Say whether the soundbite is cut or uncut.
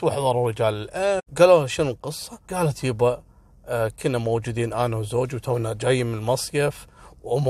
cut